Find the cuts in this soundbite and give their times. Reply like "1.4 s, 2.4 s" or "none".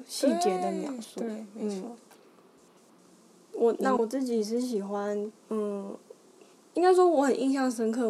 4.0 s, 5.4 s